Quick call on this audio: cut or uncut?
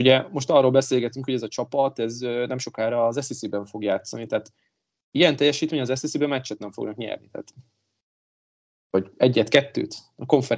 uncut